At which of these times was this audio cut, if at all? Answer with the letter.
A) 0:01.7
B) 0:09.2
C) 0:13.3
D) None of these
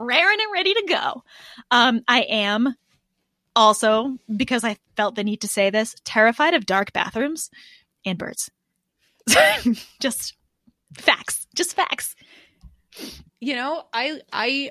C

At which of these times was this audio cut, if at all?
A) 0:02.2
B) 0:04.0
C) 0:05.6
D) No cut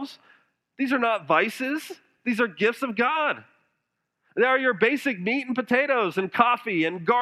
D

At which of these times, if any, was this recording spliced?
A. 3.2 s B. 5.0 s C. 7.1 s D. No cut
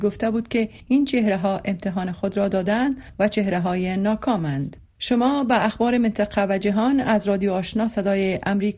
D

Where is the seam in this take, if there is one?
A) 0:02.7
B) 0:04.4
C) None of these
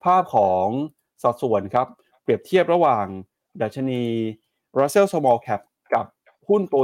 C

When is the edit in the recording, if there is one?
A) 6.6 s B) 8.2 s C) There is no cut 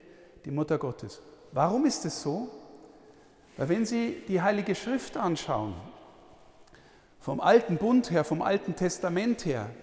C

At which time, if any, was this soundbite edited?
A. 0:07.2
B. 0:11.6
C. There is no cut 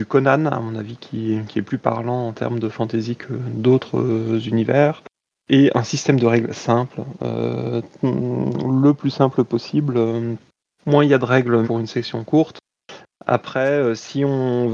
B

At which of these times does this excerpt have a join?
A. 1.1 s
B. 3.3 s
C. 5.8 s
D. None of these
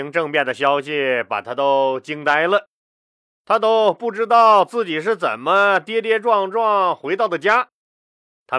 D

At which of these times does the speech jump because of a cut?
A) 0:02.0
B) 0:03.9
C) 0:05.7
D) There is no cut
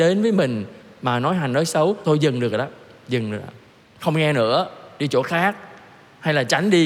A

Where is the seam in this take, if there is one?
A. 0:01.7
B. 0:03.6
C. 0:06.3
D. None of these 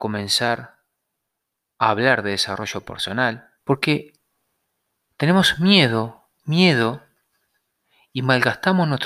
B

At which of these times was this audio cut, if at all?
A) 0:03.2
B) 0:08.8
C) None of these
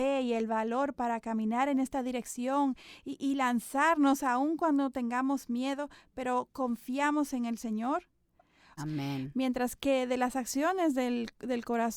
B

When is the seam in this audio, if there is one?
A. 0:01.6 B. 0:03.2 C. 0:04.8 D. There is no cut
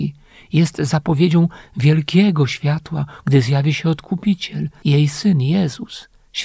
B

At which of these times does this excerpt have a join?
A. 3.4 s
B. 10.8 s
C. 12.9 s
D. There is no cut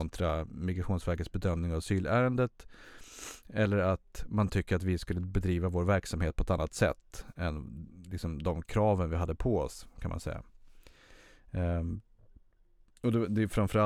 D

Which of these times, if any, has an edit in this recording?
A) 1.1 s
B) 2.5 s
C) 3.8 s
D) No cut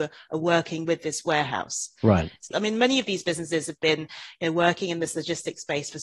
B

